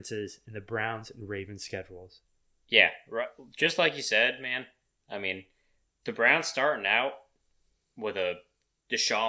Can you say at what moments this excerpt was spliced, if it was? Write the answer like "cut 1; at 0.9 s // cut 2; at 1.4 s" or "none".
none